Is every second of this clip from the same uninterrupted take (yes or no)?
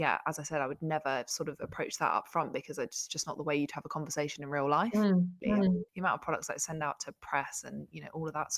no